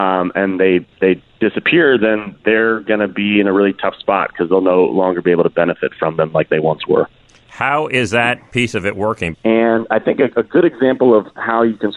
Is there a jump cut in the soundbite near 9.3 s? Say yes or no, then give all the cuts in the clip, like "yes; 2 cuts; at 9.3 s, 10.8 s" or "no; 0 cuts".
yes; 1 cut; at 9.3 s